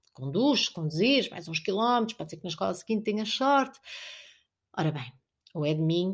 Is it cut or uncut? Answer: uncut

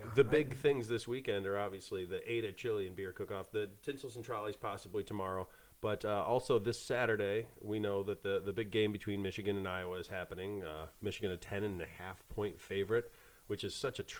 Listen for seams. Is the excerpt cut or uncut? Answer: uncut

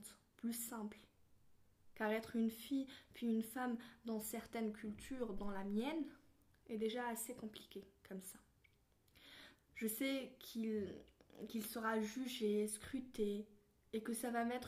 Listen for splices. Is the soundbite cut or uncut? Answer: cut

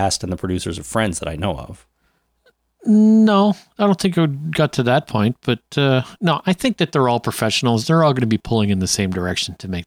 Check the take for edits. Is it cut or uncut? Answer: uncut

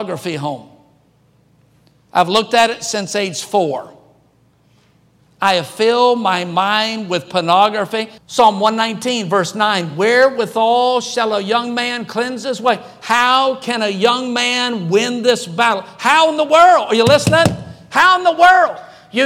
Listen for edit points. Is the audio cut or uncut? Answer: cut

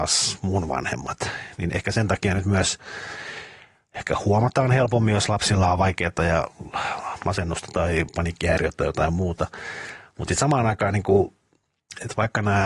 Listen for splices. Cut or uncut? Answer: uncut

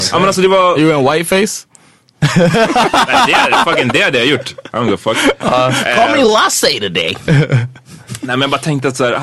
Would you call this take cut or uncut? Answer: uncut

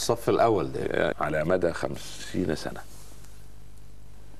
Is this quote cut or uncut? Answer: cut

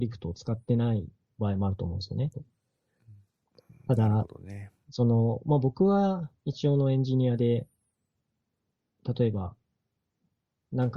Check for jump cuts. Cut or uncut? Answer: cut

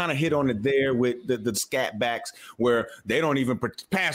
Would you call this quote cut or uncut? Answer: cut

